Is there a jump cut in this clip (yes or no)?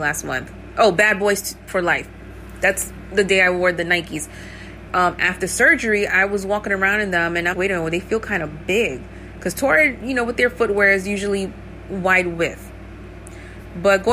yes